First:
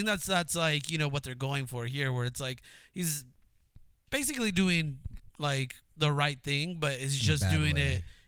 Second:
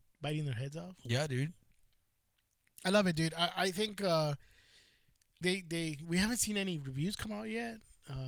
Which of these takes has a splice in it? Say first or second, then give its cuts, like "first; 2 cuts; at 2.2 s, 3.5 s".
second; 1 cut; at 5.4 s